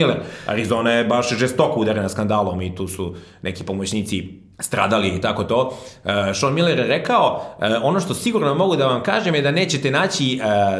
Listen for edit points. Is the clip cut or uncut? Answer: cut